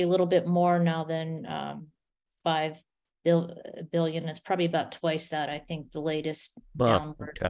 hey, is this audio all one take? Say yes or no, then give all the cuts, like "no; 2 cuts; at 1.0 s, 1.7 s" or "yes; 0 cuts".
yes; 0 cuts